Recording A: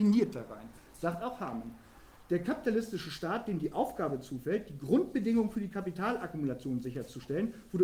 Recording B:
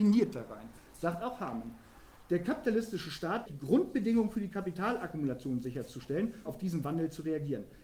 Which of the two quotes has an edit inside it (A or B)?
B